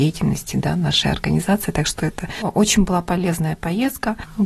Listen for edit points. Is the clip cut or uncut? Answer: uncut